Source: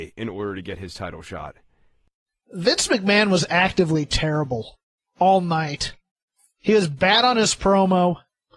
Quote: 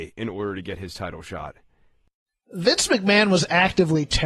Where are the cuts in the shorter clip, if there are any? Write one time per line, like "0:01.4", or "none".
none